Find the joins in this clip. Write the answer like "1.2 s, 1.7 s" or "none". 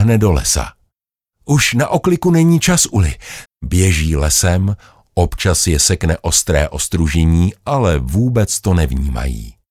3.5 s